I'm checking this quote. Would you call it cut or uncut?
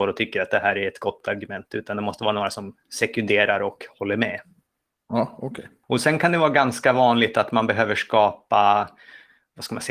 uncut